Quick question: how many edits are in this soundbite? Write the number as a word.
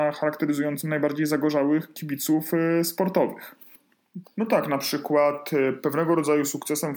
one